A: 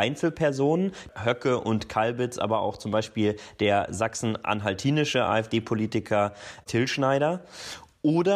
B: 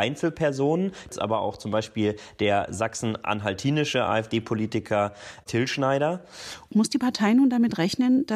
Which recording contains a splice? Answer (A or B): B